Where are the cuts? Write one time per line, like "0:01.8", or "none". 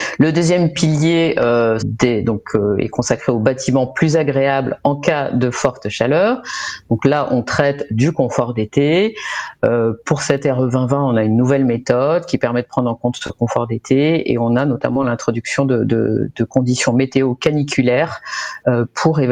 0:01.8